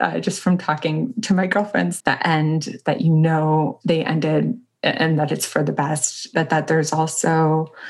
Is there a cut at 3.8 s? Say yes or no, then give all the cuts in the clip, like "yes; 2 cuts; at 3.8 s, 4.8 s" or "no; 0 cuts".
no; 1 cut; at 2.0 s